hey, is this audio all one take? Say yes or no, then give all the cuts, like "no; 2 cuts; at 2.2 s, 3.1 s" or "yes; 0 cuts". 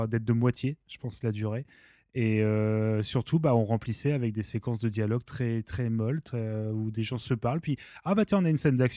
yes; 0 cuts